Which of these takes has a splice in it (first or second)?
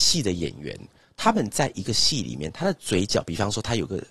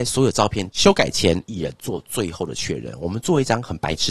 second